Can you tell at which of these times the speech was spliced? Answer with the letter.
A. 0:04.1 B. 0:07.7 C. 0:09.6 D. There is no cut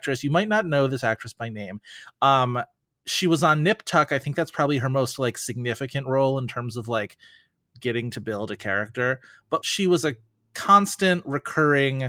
C